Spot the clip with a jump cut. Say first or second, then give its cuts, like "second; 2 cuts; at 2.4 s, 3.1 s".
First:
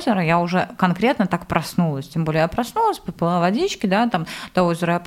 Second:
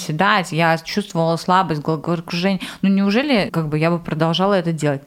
second; 1 cut; at 3.5 s